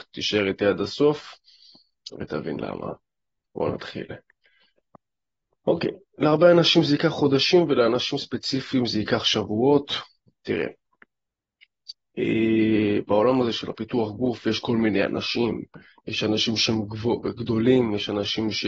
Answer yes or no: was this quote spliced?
no